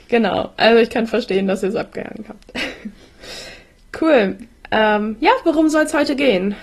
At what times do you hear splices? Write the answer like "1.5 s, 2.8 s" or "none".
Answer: none